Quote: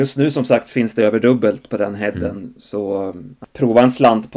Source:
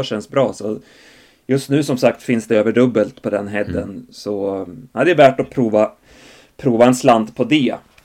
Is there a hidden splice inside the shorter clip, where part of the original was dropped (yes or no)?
yes